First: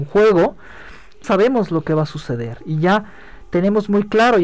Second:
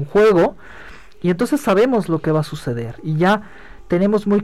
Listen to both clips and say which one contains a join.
first; 1 cut; at 1.2 s

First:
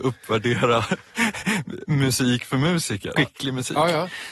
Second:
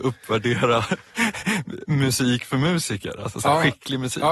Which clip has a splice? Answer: first; 1 cut; at 3.2 s

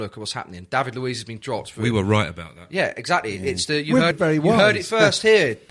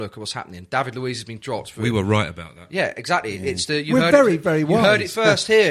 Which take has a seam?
first; 1 cut; at 4.1 s

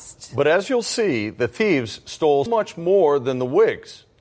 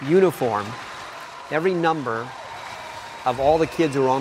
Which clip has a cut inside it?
first; 1 cut; at 2.5 s

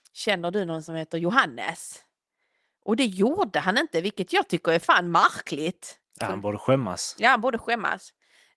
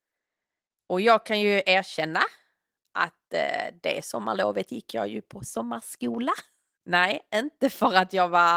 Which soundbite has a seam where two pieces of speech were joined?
second; 1 cut; at 6.8 s

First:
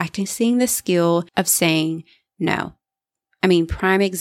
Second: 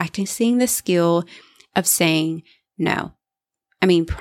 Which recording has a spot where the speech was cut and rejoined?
first; 1 cut; at 1.3 s

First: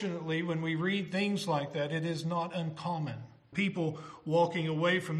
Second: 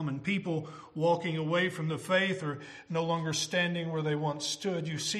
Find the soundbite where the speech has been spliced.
first; 1 cut; at 3.5 s

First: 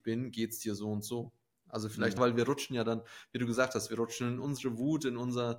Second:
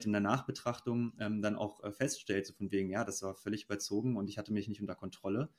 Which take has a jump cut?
first; 1 cut; at 2.2 s

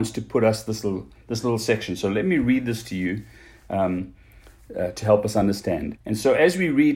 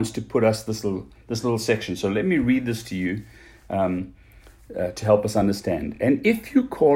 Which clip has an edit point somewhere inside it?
first; 1 cut; at 6.0 s

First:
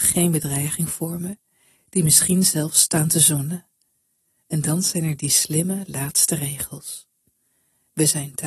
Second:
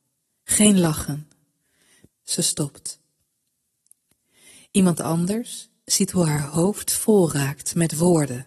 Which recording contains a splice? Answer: second; 1 cut; at 2.1 s

